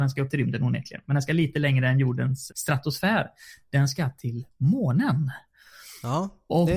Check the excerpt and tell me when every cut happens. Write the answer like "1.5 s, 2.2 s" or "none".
2.5 s